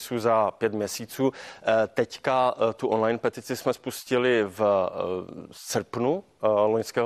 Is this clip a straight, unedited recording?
yes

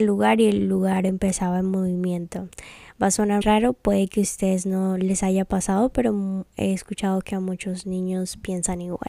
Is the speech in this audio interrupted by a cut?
yes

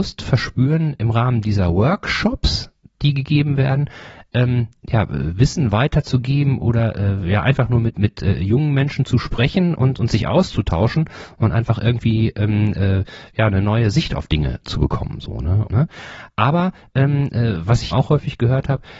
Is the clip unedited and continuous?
no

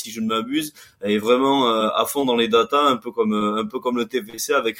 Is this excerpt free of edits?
yes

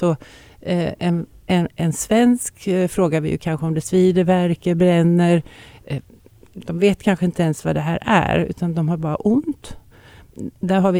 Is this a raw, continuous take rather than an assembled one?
yes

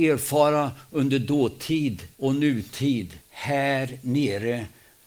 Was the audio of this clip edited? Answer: yes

